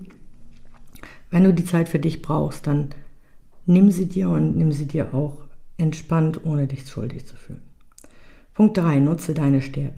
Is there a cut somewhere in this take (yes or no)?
no